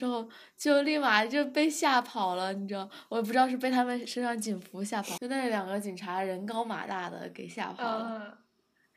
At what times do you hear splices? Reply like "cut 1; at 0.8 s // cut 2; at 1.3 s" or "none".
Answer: cut 1; at 5.2 s